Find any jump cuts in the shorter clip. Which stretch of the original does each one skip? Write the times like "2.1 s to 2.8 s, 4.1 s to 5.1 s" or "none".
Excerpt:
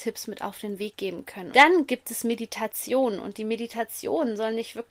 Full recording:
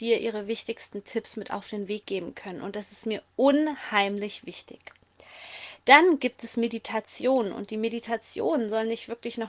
2.6 s to 5.8 s